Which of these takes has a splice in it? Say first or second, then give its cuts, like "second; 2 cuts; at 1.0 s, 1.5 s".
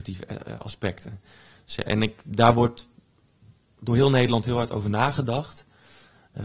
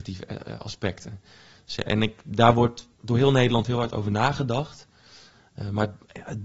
second; 1 cut; at 2.9 s